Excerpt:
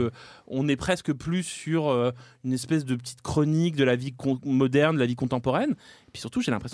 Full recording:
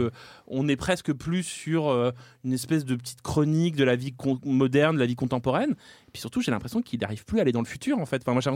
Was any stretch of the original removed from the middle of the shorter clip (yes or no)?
no